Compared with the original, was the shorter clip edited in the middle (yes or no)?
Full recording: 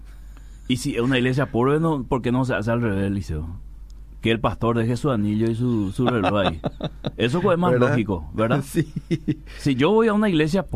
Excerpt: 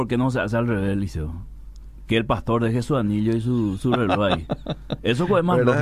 no